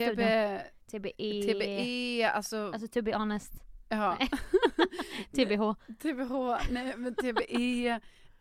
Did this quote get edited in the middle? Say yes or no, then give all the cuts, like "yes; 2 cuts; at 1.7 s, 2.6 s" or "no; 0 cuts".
no; 0 cuts